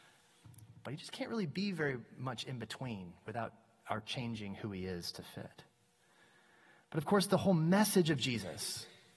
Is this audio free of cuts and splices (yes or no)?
yes